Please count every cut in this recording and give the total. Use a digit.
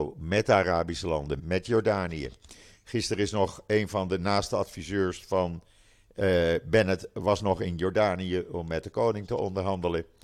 1